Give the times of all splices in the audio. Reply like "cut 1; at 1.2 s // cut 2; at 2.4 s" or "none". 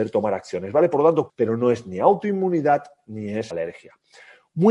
cut 1; at 1.3 s // cut 2; at 3.5 s